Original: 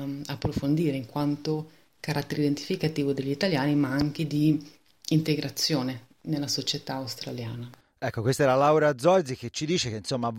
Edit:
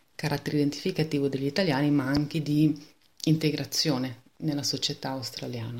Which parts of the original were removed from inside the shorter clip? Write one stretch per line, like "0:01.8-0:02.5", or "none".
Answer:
none